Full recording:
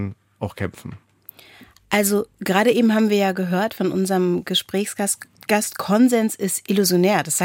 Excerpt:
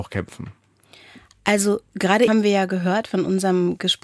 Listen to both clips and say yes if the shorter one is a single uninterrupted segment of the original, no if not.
no